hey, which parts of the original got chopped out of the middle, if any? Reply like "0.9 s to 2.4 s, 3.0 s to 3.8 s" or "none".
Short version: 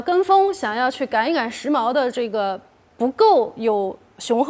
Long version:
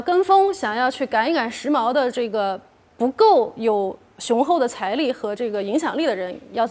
none